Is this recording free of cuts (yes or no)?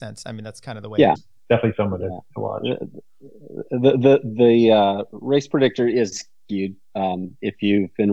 no